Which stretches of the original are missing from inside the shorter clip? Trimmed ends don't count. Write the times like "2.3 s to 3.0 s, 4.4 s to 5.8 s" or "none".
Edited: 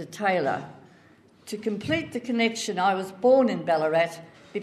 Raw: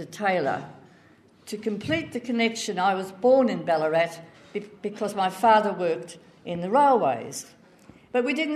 none